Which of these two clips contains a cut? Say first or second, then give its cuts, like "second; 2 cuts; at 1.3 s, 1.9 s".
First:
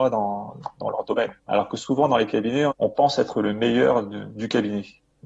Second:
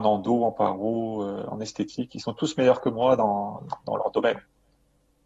first; 2 cuts; at 1.4 s, 2.7 s